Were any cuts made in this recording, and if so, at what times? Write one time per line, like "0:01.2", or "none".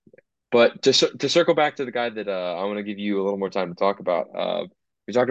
none